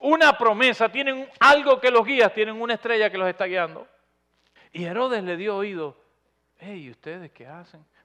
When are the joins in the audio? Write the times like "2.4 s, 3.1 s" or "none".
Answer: 4.6 s